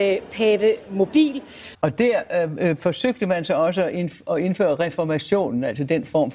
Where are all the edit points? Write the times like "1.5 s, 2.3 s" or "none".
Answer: 1.7 s